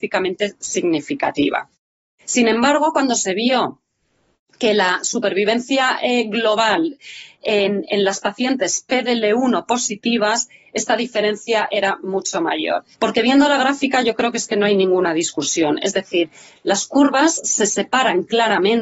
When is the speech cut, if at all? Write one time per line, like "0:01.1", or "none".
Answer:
0:12.9